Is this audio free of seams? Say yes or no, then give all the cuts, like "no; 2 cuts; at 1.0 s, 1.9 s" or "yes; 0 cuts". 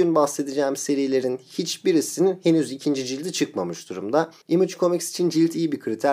yes; 0 cuts